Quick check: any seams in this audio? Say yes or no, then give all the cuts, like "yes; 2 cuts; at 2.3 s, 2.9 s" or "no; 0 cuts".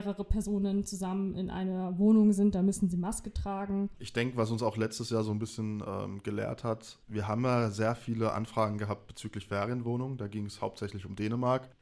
no; 0 cuts